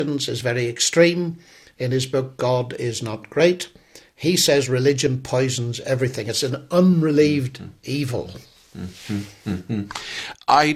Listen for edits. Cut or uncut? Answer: uncut